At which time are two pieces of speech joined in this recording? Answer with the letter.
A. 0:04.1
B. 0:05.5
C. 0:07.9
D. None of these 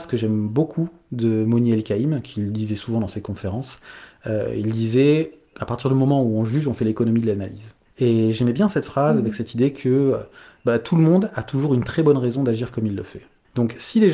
B